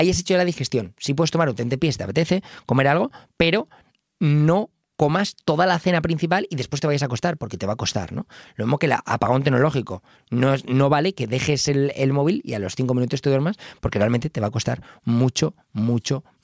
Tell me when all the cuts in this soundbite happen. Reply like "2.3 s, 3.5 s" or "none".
none